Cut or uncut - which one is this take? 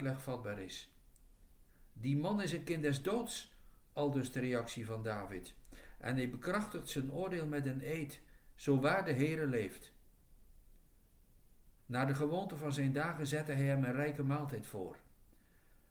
cut